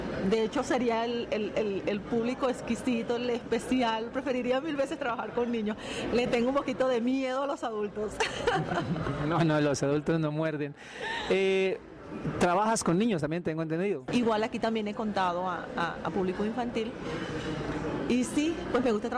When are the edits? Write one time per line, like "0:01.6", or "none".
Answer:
0:14.1